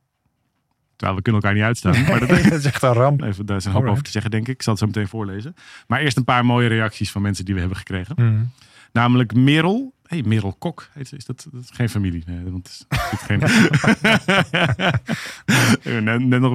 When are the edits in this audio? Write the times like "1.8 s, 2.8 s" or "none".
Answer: 3.2 s, 13.4 s